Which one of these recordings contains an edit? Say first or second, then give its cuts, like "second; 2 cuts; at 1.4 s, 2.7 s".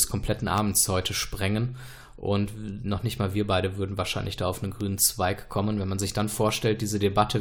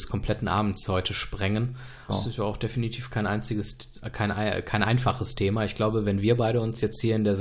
second; 1 cut; at 2.1 s